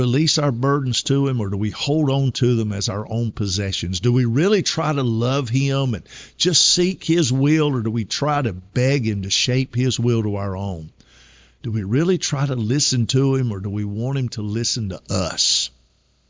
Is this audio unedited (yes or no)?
yes